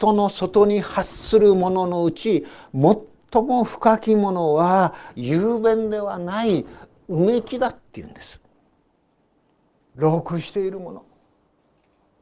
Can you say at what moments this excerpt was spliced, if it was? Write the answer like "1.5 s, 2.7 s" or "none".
9.9 s